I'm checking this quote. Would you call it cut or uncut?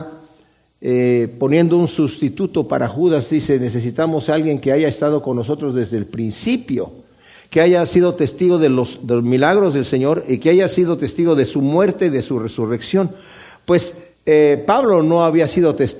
uncut